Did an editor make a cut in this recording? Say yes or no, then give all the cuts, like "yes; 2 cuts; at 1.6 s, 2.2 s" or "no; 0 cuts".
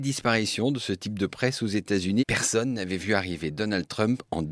yes; 1 cut; at 2.2 s